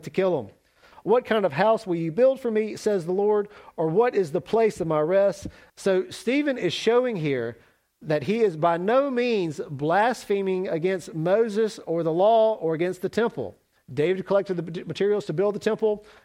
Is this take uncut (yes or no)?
no